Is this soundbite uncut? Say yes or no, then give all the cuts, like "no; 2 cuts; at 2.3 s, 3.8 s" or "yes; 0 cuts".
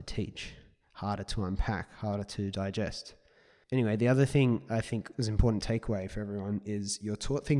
no; 1 cut; at 3.6 s